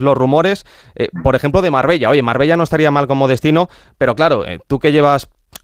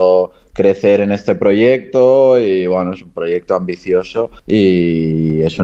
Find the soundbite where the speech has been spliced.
second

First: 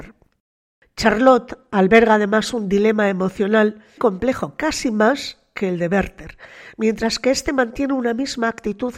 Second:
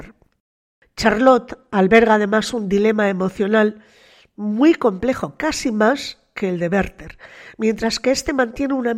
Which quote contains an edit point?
first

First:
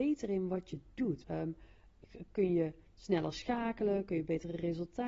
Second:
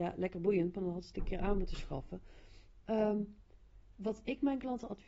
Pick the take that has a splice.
first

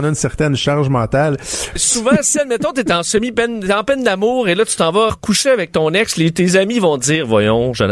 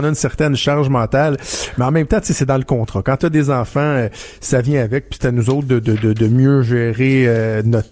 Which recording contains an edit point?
first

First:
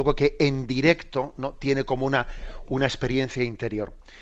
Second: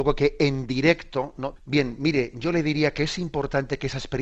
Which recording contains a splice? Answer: second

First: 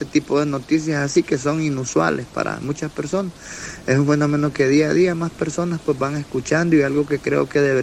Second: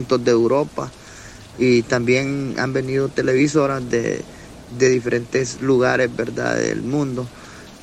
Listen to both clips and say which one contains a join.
second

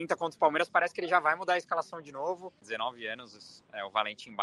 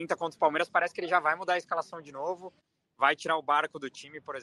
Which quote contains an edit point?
first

